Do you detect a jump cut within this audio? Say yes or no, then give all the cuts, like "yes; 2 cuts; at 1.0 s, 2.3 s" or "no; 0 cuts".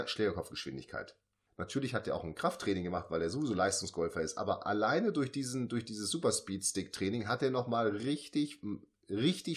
yes; 1 cut; at 1.5 s